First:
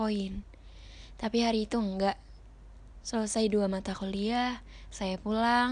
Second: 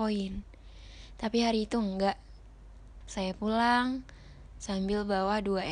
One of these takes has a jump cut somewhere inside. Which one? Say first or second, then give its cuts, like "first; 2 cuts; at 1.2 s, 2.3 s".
second; 1 cut; at 3.0 s